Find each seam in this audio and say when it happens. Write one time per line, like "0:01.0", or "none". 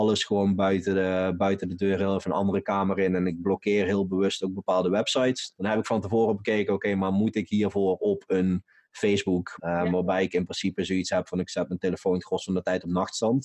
0:05.5
0:09.6